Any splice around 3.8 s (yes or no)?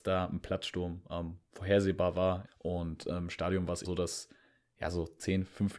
yes